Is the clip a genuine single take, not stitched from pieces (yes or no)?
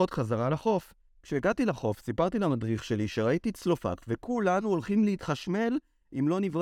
yes